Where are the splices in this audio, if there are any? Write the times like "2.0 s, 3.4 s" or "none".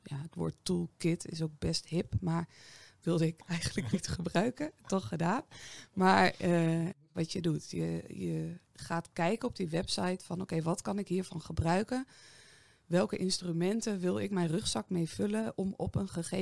7.1 s, 8.6 s